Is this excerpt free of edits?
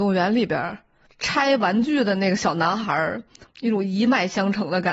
yes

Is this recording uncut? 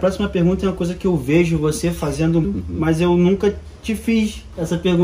no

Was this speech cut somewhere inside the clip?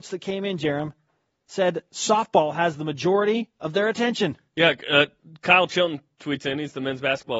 no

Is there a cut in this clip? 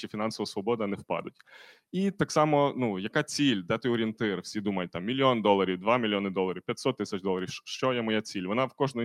no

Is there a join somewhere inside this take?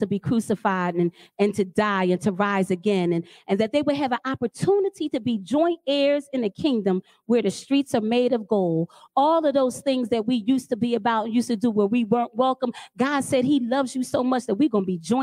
no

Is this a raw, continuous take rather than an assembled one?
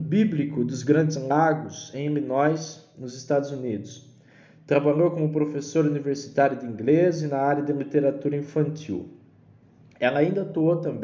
yes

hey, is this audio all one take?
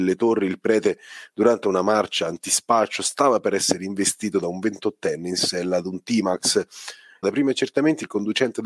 no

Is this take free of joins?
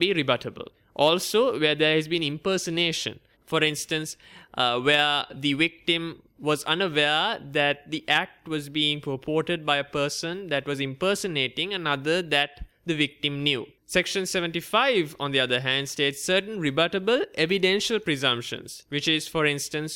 no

